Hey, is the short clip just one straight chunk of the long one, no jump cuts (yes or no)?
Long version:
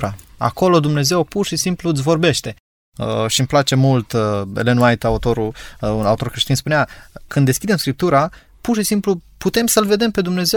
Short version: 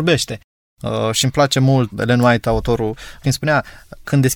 no